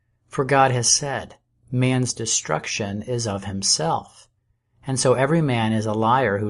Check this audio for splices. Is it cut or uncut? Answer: uncut